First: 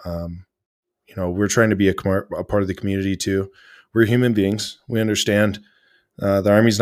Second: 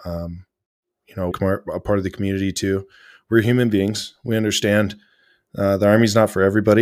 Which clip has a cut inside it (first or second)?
second